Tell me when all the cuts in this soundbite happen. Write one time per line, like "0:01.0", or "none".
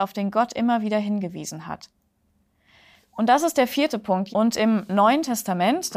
0:04.3